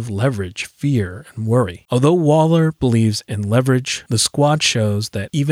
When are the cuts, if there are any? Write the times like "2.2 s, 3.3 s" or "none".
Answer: 1.9 s